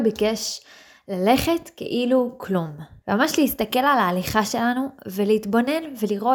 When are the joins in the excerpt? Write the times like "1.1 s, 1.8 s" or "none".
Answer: 3.0 s

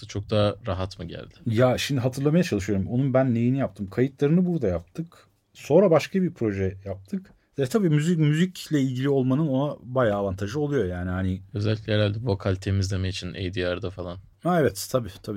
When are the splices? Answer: none

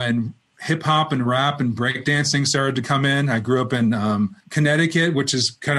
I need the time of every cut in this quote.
4.4 s

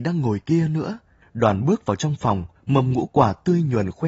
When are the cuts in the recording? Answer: 1.2 s, 2.6 s

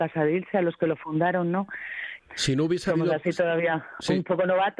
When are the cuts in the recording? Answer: 2.2 s

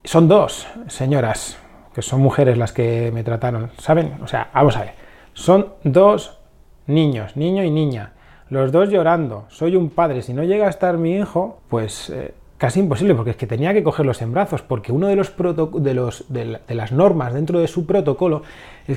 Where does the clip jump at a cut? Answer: none

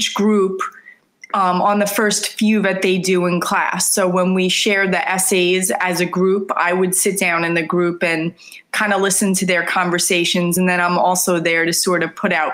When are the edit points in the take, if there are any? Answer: none

